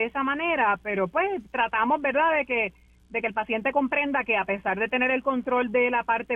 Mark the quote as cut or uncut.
uncut